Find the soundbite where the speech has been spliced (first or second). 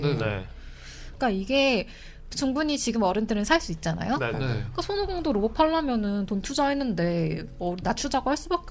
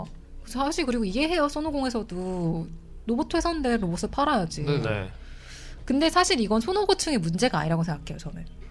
first